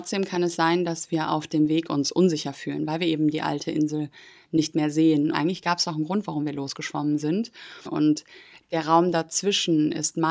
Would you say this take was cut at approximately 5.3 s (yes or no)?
yes